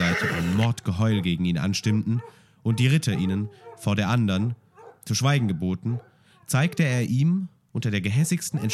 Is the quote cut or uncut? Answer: uncut